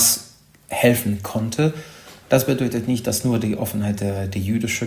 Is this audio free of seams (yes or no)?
no